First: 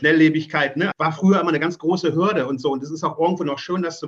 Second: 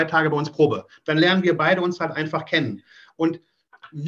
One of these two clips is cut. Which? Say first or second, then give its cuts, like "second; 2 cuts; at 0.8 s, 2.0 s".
first; 1 cut; at 0.9 s